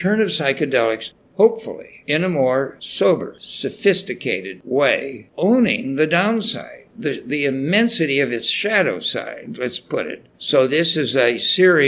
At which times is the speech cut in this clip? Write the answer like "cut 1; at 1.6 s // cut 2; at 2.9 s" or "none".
cut 1; at 10.3 s